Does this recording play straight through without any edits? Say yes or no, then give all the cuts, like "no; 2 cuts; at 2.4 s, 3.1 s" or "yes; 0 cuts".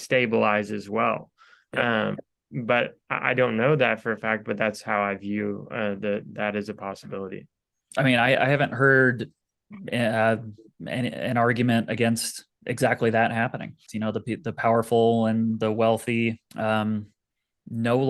no; 3 cuts; at 12.5 s, 13.9 s, 16.5 s